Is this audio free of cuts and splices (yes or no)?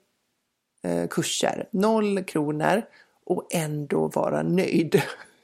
no